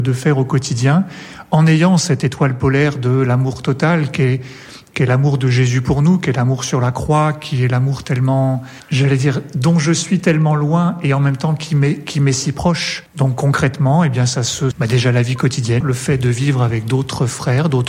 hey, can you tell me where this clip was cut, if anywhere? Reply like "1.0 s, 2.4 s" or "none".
13.1 s, 14.7 s, 15.8 s